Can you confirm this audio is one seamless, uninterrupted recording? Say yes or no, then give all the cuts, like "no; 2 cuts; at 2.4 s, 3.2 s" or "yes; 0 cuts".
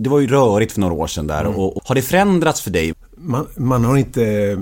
no; 2 cuts; at 1.8 s, 2.9 s